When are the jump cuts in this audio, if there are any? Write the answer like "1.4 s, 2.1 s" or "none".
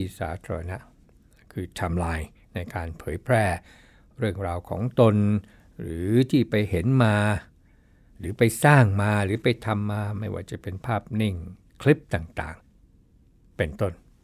12.6 s